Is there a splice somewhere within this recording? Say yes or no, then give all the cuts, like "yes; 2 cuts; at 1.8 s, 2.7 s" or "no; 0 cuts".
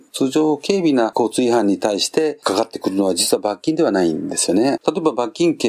yes; 1 cut; at 4.8 s